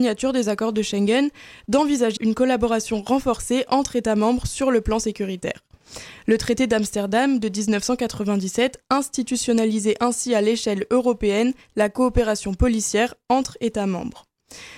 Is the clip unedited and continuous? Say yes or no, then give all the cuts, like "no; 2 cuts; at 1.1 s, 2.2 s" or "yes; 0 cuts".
no; 1 cut; at 2.2 s